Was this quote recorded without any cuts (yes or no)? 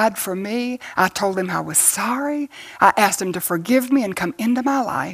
yes